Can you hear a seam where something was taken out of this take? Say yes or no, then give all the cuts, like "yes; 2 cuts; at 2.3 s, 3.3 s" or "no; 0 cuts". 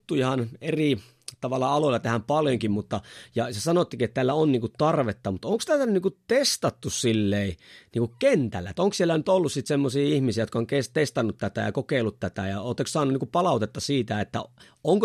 no; 0 cuts